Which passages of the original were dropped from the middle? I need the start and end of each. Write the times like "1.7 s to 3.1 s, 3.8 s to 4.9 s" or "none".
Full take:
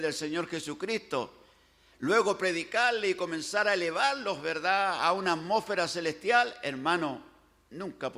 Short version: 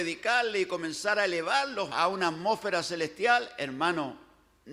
4.4 s to 5.0 s